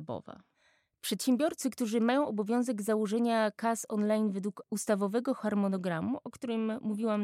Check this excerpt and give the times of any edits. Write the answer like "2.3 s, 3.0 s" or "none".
none